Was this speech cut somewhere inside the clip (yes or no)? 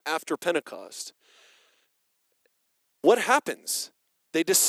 no